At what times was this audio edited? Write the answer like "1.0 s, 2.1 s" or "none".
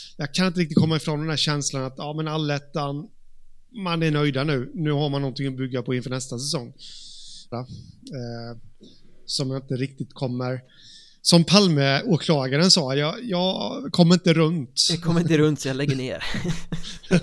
7.5 s